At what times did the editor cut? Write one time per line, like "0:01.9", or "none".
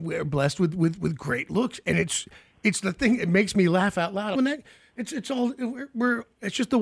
0:04.3

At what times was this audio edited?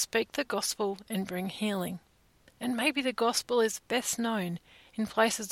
0:02.5

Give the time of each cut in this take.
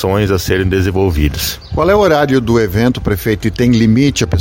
none

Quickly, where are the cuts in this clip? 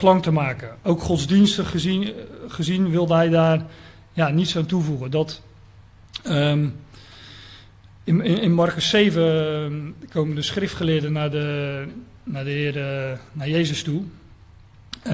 none

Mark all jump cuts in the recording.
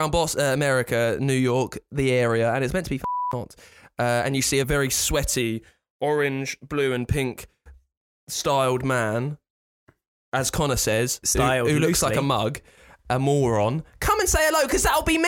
0:04.6

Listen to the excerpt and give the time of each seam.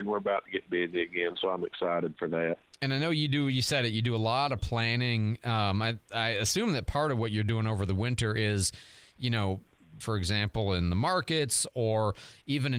0:10.0

